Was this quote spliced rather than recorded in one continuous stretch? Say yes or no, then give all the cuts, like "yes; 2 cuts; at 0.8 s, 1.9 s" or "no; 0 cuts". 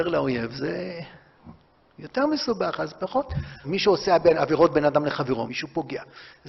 yes; 2 cuts; at 3.6 s, 5.5 s